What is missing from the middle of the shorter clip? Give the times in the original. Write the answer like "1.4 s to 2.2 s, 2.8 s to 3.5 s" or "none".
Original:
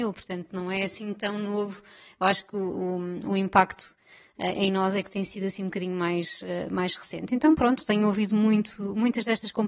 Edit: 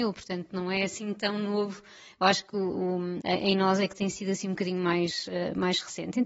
3.2 s to 4.4 s

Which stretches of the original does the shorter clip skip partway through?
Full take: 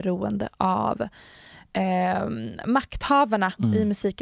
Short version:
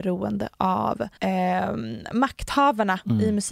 1.2 s to 1.7 s

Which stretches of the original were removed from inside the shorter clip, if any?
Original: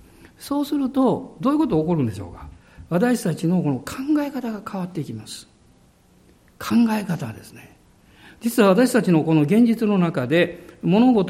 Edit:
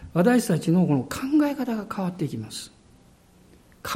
none

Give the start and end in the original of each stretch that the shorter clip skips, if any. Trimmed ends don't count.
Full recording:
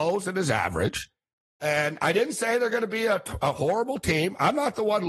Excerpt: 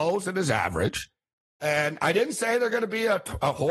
none

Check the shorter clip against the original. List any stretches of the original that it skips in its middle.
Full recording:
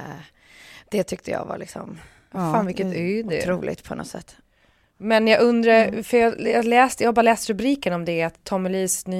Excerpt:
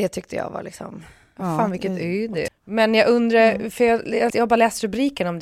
3.4 s to 4.8 s, 6.6 s to 7.0 s

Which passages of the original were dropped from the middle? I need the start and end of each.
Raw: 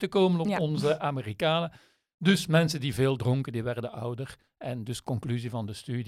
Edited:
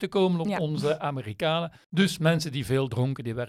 1.8 s to 2.1 s

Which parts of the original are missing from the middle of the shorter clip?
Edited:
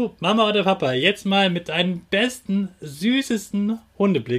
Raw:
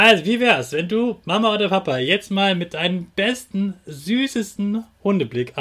none

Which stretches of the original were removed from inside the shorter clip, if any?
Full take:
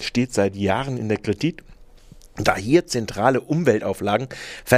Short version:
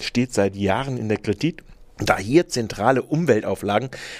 1.9 s to 2.3 s

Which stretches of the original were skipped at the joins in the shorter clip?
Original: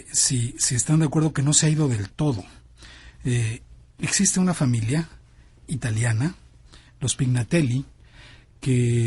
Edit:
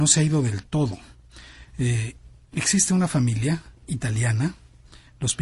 5.2 s to 5.6 s

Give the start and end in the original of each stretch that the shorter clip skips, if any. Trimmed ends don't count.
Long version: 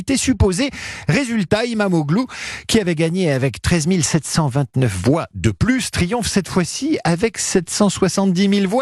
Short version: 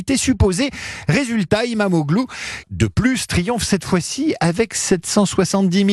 2.6 s to 5.3 s

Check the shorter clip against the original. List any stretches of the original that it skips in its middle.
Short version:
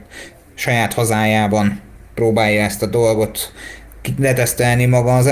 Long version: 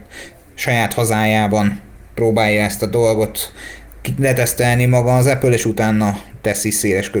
none

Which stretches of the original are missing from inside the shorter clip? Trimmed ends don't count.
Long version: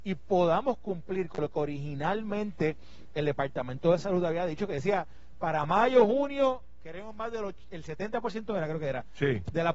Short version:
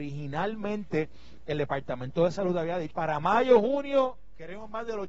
4.6 s to 5.4 s

